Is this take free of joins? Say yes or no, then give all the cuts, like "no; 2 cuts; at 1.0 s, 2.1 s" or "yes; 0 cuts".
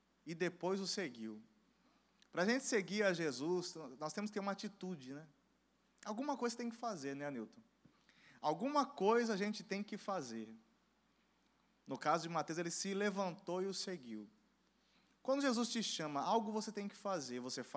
yes; 0 cuts